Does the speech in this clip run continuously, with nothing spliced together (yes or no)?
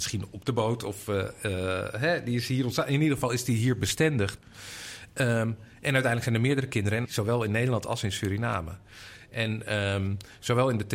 no